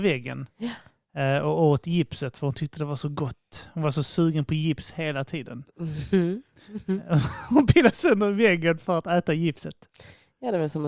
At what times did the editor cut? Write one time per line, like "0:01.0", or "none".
none